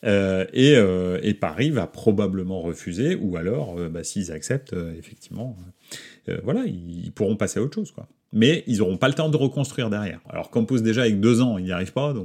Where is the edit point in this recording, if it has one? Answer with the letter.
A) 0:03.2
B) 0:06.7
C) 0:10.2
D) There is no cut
C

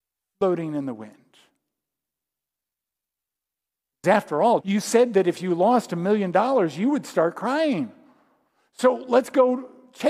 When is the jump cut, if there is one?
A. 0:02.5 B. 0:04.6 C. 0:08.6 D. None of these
B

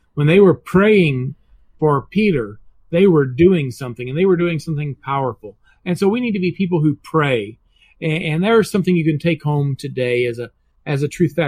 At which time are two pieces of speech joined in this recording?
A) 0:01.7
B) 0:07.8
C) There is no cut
C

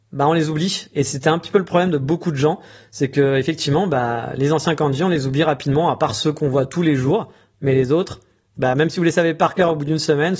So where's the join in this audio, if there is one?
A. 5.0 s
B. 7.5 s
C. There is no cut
C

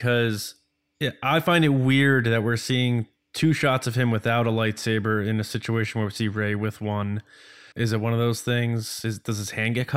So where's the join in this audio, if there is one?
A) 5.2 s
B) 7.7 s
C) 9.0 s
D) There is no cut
B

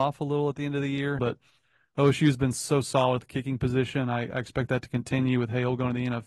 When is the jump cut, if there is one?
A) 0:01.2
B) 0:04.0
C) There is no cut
A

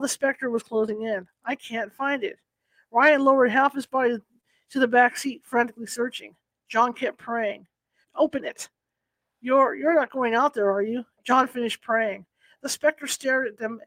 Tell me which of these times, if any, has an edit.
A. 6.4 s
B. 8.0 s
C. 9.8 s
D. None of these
B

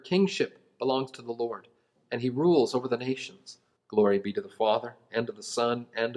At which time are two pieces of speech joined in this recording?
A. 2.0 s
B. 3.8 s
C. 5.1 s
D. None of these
B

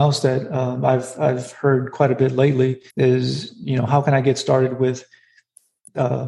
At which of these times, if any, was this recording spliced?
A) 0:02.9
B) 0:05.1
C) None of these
A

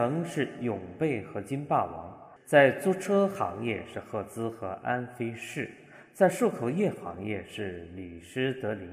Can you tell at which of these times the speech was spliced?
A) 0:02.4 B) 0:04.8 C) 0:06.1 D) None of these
A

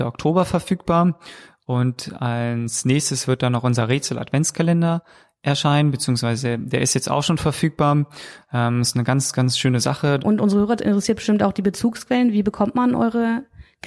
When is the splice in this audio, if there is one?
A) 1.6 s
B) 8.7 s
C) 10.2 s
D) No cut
C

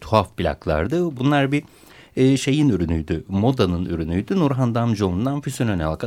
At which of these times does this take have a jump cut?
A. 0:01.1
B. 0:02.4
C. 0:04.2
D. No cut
D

